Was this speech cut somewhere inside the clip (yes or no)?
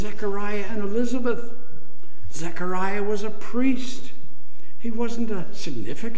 no